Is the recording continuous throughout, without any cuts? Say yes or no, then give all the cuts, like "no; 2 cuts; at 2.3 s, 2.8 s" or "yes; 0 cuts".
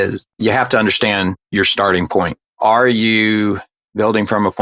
yes; 0 cuts